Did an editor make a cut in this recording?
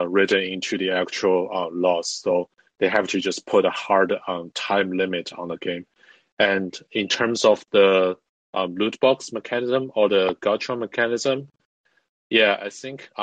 no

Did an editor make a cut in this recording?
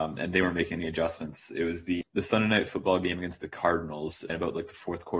yes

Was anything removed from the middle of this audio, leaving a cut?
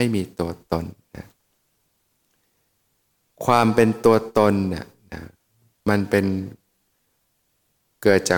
no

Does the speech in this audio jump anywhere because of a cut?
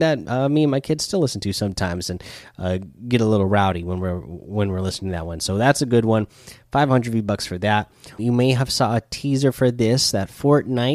yes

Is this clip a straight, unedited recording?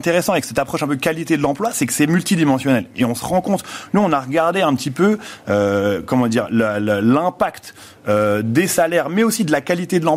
yes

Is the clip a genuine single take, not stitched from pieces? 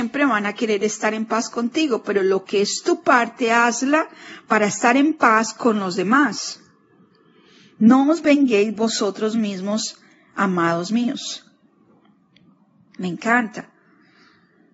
yes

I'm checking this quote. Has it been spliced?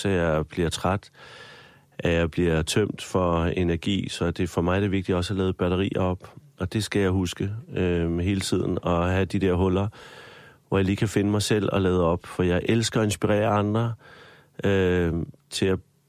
no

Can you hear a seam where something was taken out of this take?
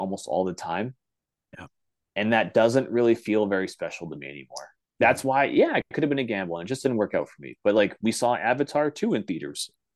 yes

